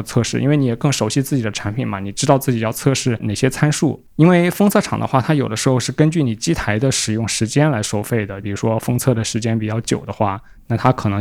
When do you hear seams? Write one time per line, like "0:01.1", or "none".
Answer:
0:08.4